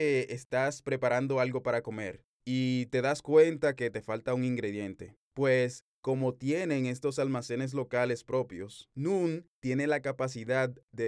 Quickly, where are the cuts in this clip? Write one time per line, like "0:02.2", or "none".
none